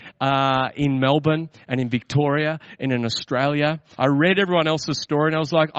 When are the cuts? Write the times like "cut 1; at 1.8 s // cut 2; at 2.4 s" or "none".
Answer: cut 1; at 3.9 s